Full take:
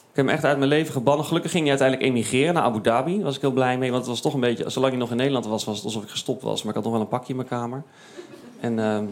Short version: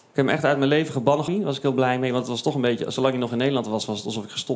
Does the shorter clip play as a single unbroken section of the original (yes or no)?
no